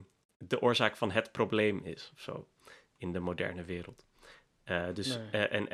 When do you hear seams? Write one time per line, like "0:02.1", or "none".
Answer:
none